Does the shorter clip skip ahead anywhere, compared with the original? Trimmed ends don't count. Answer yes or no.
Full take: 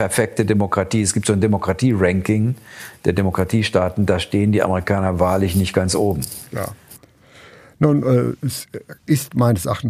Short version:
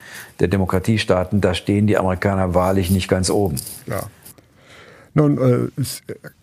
no